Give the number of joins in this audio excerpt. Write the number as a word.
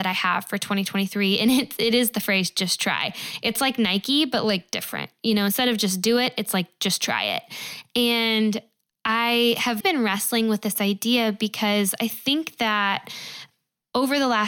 one